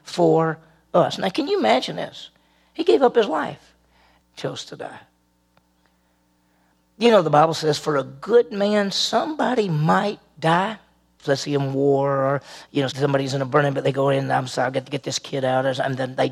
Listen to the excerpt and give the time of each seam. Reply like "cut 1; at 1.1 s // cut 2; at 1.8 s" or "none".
cut 1; at 4.2 s // cut 2; at 11.2 s // cut 3; at 12.9 s